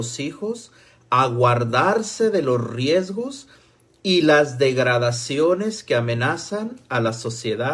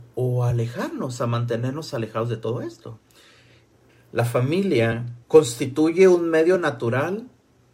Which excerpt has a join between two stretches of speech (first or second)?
second